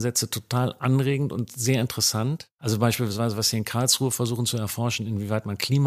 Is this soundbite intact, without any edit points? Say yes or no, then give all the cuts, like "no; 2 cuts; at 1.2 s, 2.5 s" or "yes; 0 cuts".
yes; 0 cuts